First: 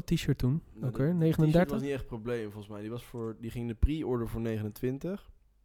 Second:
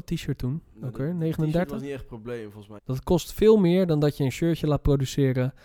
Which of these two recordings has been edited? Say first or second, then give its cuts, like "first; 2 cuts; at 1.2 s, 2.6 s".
second; 1 cut; at 2.8 s